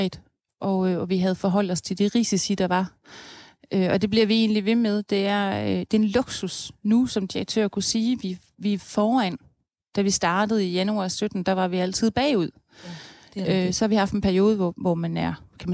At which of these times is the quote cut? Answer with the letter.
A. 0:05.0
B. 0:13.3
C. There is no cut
C